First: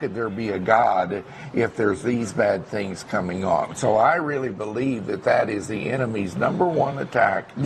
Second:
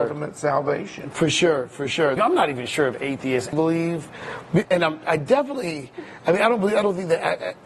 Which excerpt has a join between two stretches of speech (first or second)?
second